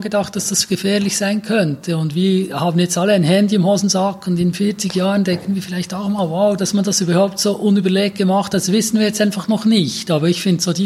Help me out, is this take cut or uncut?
cut